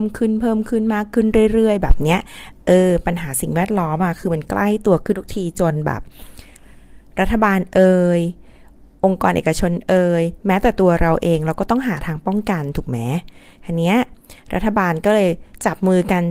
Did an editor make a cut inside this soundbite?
no; 0 cuts

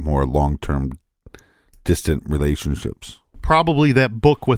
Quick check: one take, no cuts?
yes; 0 cuts

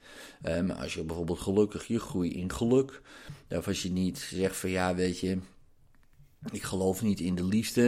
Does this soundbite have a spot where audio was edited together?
no; 0 cuts

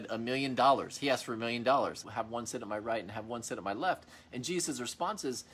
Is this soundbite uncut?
no; 1 cut; at 2.0 s

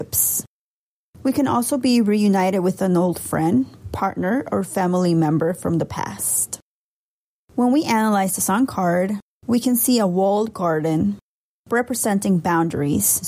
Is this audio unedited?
yes; 0 cuts

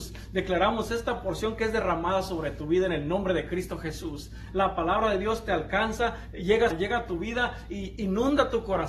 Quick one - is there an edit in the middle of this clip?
yes; 2 cuts; at 4.5 s, 6.7 s

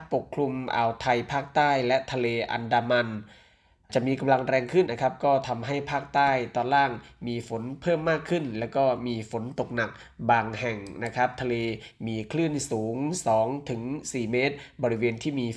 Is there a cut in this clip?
yes; 1 cut; at 4.9 s

